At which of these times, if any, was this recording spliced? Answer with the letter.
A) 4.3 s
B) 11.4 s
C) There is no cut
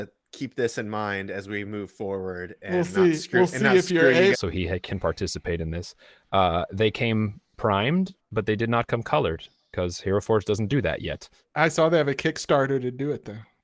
A